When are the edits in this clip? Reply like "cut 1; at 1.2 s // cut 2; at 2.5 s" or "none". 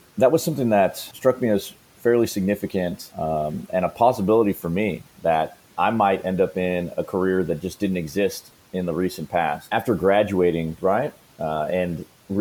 cut 1; at 10.8 s